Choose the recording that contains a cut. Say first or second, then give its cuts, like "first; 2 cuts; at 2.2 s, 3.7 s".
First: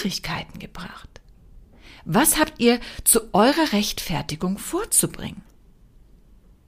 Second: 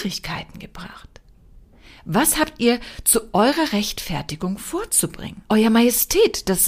second; 1 cut; at 5.5 s